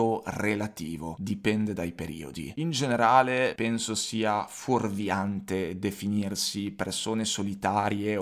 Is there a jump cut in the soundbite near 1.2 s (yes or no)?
no